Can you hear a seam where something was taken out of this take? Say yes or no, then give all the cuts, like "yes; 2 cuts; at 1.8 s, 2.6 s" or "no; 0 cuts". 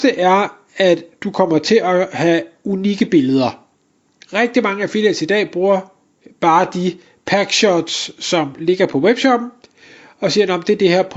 no; 0 cuts